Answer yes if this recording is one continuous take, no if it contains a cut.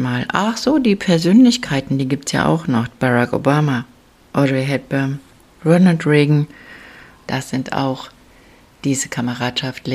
no